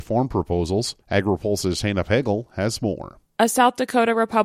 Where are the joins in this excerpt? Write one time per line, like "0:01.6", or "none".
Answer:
0:01.0

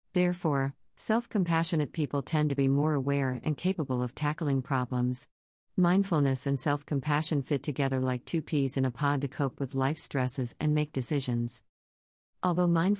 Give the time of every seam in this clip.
0:05.7

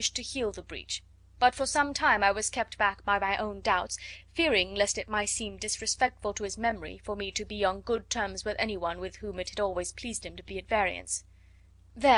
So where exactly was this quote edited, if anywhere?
none

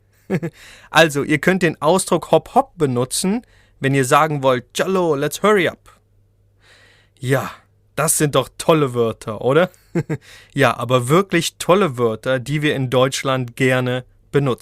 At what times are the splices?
0:04.7
0:10.4

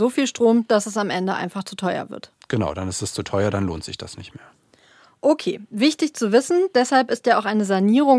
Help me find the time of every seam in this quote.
none

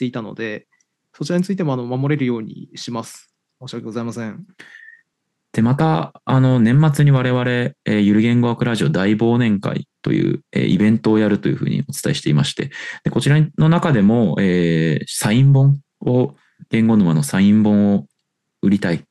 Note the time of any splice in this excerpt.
0:03.5

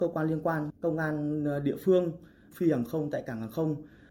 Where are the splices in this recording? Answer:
0:02.5

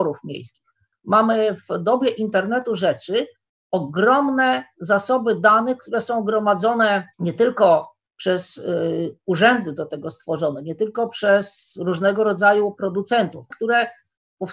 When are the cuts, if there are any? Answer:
0:00.9
0:07.1
0:13.5

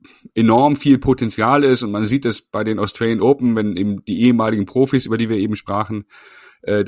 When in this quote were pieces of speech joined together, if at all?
none

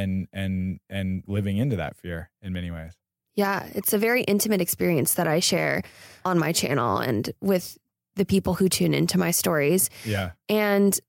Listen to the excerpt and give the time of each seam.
0:01.3

